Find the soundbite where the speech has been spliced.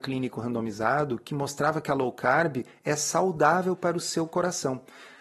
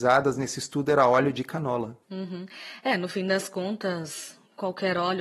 second; 1 cut; at 2.0 s

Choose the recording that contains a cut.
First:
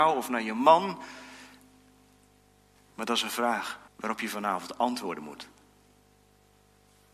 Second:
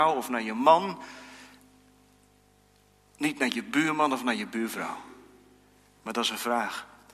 first; 2 cuts; at 2.8 s, 3.9 s

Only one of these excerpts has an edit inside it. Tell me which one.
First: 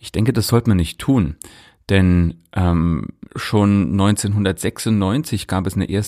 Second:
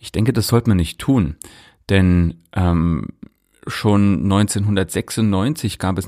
first; 1 cut; at 3.3 s

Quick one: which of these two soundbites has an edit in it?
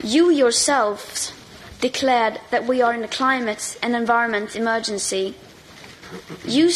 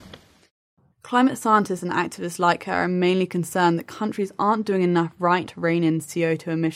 second; 1 cut; at 5.4 s

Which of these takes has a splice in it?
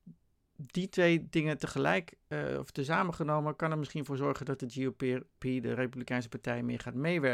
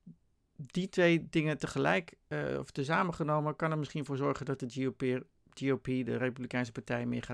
first; 1 cut; at 5.4 s

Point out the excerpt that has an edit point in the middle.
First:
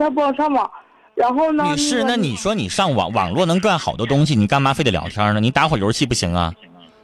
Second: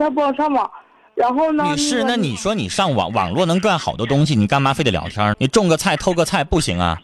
second; 1 cut; at 5.3 s

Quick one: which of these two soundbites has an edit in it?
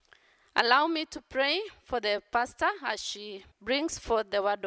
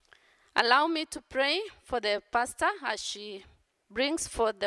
first; 1 cut; at 3.5 s

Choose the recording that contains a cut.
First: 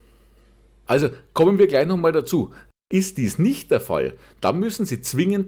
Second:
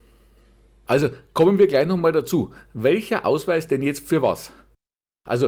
first; 1 cut; at 2.7 s

